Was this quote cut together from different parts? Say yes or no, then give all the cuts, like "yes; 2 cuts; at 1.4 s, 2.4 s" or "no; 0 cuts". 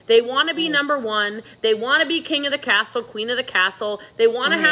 no; 0 cuts